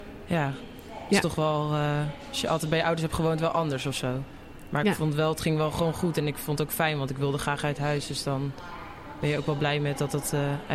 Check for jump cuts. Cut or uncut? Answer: uncut